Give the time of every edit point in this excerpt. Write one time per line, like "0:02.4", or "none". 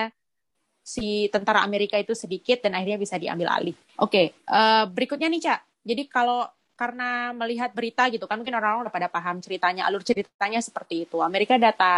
0:03.9